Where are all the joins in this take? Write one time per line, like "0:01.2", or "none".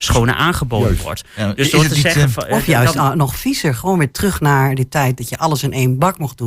none